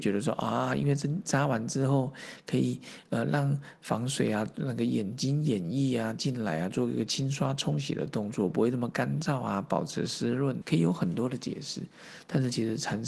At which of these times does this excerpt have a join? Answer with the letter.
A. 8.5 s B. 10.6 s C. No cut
B